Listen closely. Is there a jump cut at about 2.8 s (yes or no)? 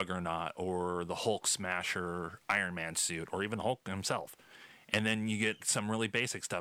no